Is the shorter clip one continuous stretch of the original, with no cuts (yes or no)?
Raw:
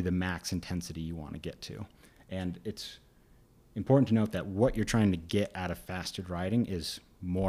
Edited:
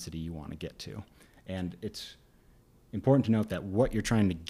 yes